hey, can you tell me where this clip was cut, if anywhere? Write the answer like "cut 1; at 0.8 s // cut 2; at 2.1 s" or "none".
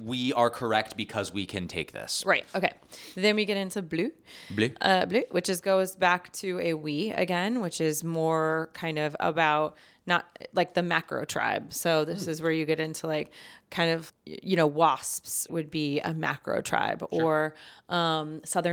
cut 1; at 14.1 s // cut 2; at 15.5 s